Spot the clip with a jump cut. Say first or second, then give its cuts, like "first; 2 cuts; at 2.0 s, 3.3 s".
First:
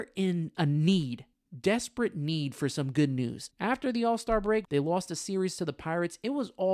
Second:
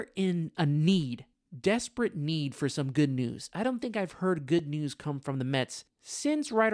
first; 2 cuts; at 3.5 s, 4.6 s